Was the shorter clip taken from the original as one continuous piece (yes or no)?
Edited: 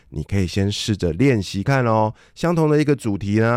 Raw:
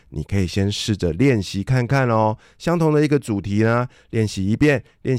no